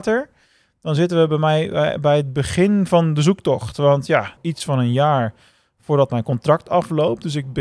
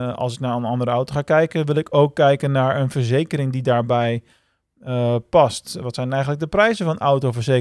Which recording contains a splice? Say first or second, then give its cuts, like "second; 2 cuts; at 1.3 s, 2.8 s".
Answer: first; 1 cut; at 4.4 s